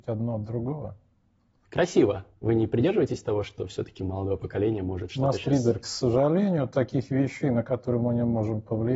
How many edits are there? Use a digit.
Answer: 1